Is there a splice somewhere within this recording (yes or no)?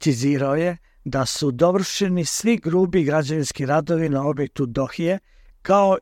no